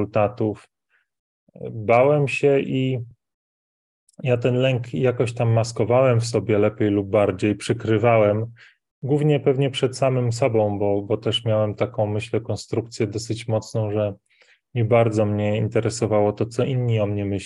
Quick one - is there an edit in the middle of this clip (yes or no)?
no